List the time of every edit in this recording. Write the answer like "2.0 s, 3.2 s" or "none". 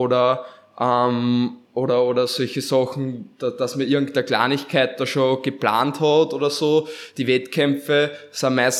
none